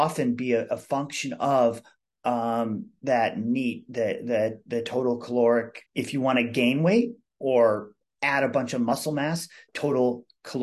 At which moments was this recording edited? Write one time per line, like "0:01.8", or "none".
0:05.9
0:09.7